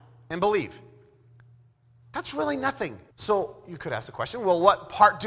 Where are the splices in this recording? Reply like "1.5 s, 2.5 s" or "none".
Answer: 3.1 s